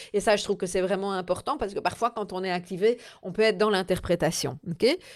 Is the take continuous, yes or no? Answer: yes